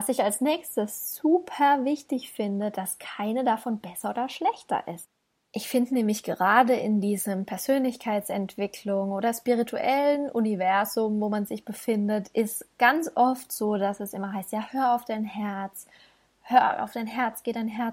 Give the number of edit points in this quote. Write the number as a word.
zero